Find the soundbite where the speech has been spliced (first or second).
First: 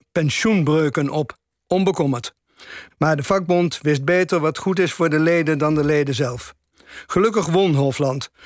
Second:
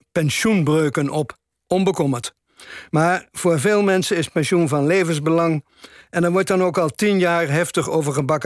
first